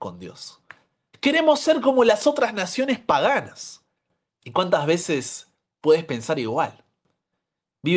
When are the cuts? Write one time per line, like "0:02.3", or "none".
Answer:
0:01.1
0:04.3